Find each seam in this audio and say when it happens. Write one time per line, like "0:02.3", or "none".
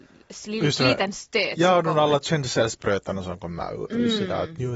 0:03.8